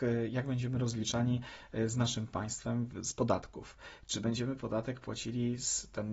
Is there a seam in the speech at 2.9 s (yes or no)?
yes